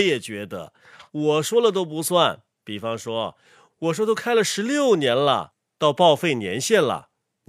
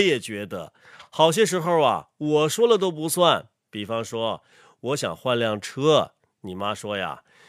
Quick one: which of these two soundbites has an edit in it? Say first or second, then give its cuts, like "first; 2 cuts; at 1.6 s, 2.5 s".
first; 2 cuts; at 1.1 s, 3.7 s